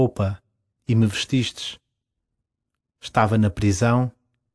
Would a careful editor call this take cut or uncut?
cut